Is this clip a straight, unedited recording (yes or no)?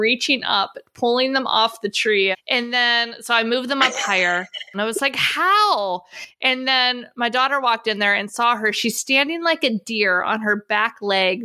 no